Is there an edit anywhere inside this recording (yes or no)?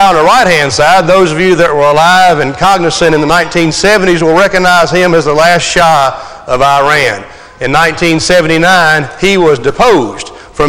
no